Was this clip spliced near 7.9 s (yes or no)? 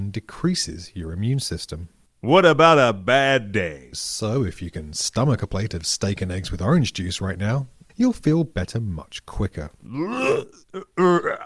yes